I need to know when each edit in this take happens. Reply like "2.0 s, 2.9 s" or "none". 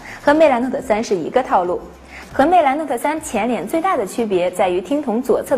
2.3 s